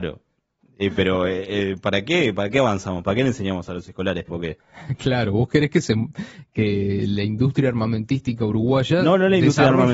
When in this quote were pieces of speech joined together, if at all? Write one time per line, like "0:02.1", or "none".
0:04.3

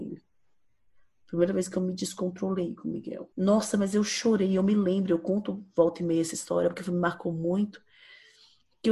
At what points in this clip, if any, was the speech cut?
0:03.3

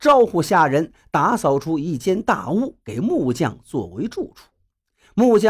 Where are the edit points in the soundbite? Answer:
none

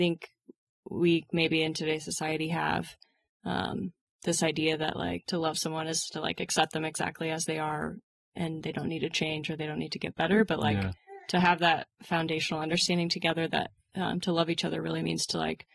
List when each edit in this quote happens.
none

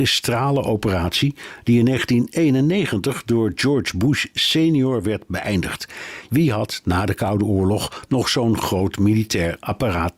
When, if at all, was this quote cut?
0:06.3

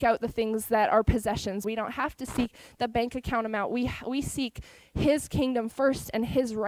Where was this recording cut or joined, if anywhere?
0:01.6

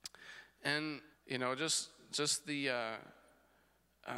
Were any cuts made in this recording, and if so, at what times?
0:01.1

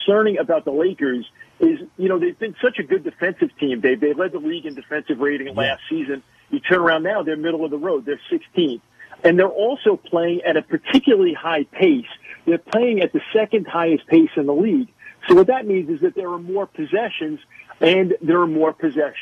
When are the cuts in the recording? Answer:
none

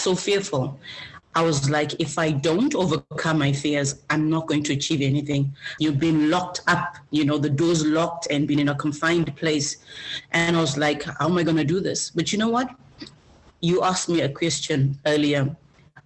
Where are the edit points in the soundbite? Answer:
0:01.2
0:05.8

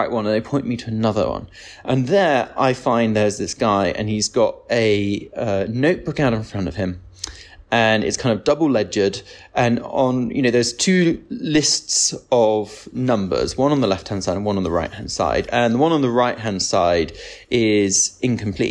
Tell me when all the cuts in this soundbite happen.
none

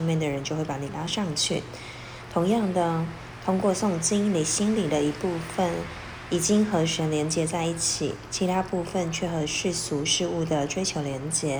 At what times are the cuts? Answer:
none

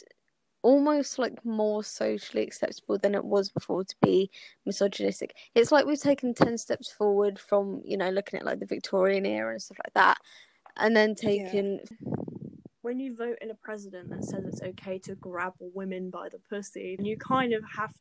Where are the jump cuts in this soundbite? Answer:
0:11.9
0:17.0

